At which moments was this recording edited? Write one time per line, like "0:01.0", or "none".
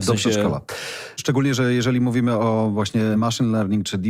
none